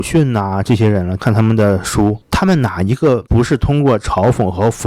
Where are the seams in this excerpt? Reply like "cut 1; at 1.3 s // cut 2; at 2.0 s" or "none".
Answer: cut 1; at 1.2 s

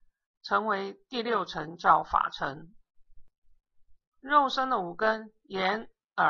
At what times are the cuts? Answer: none

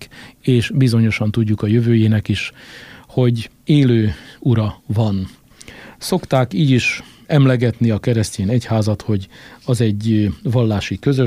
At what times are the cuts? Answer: cut 1; at 3.6 s

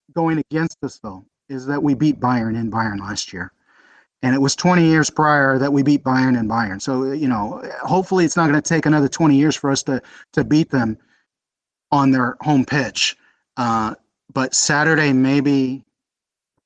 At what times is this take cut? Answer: none

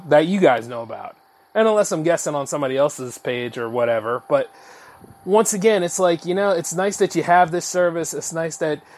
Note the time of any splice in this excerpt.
none

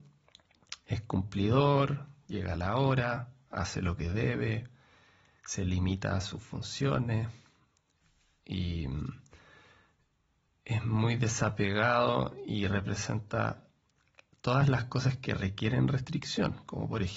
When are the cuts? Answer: none

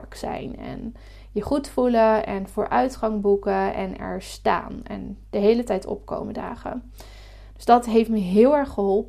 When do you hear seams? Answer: none

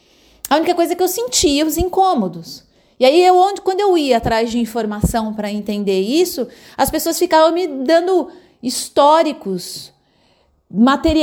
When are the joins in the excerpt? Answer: none

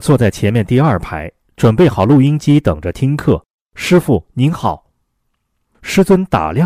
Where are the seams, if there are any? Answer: cut 1; at 3.5 s

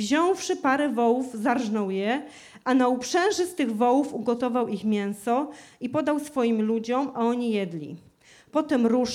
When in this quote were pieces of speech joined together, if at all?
none

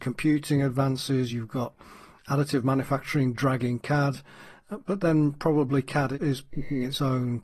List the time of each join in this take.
none

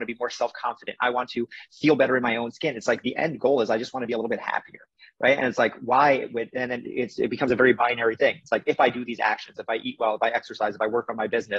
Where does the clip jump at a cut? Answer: none

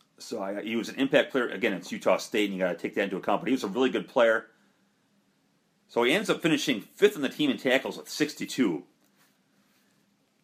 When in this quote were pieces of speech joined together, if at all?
cut 1; at 5.8 s

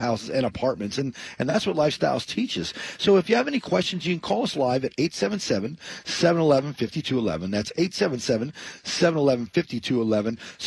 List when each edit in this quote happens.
none

